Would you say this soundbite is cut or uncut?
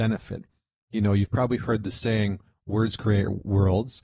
uncut